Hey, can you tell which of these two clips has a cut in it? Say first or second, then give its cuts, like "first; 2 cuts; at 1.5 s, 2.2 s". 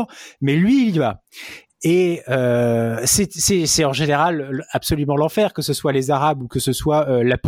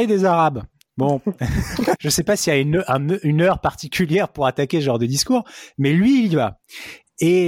second; 1 cut; at 2.0 s